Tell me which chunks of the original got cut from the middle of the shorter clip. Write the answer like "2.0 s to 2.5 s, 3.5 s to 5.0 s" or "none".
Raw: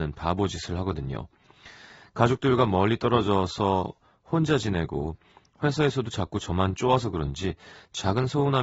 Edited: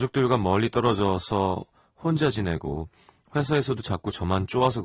none

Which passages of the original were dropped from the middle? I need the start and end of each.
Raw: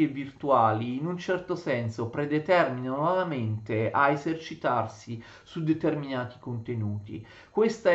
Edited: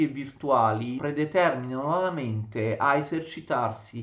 1.0 s to 2.1 s

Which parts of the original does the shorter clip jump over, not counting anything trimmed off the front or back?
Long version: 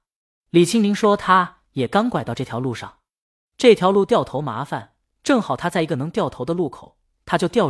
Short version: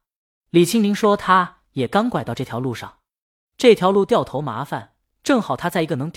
none

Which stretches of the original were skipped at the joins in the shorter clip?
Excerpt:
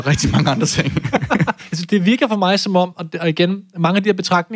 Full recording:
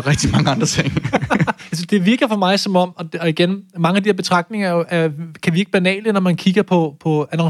none

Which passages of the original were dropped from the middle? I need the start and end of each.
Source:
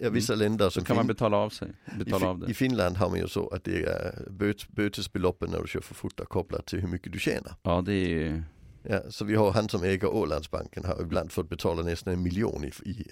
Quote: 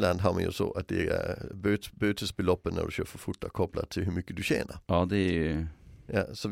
none

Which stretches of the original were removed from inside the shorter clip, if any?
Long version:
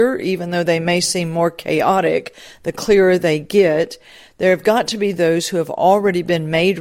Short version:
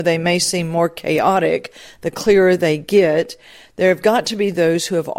none

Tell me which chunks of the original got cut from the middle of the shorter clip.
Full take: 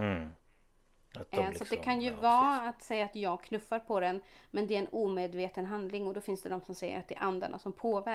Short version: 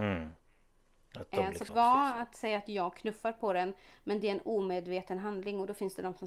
1.7 s to 2.2 s

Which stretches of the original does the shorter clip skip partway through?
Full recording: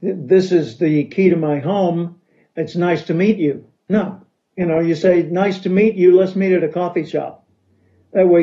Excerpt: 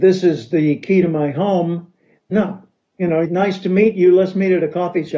2.5 s to 3.8 s, 4.8 s to 5.2 s

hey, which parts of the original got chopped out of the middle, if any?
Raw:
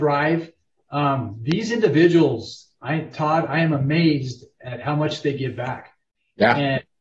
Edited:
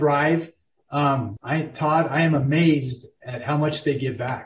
1.4 s to 2.8 s

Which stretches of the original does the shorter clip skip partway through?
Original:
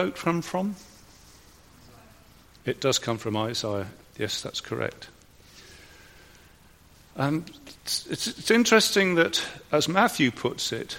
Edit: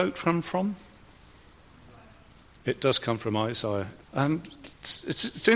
4.0 s to 7.1 s

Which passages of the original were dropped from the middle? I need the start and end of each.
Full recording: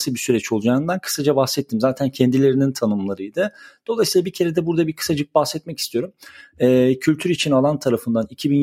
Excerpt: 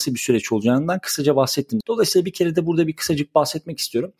1.8 s to 3.8 s

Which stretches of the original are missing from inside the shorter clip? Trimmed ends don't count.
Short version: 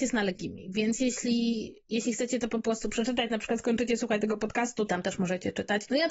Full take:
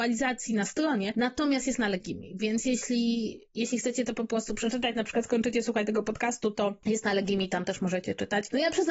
6.5 s to 7.5 s

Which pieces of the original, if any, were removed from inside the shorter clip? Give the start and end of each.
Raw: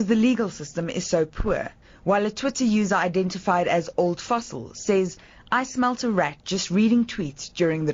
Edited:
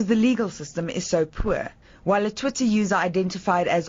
none

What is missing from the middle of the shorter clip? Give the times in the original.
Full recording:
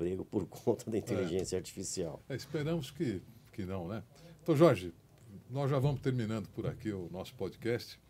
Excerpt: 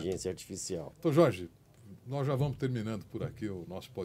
2.2 s to 4.4 s

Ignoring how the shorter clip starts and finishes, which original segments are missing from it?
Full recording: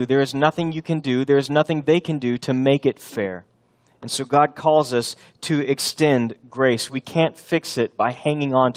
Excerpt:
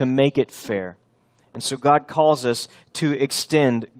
none

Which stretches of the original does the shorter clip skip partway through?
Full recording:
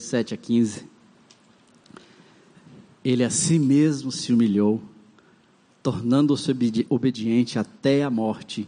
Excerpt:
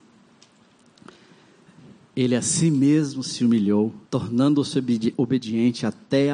4.9 s to 5.8 s

